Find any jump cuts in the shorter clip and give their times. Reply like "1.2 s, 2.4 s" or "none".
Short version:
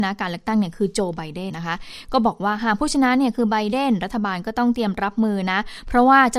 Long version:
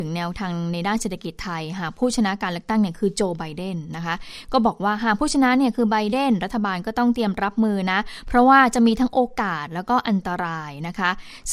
1.5 s